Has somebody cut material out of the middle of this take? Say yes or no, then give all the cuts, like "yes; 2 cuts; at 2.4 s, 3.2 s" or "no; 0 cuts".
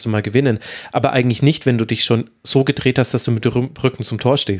no; 0 cuts